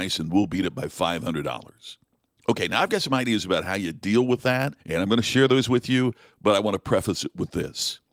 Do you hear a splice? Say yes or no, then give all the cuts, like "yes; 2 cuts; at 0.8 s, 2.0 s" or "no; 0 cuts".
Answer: yes; 2 cuts; at 2.4 s, 4.8 s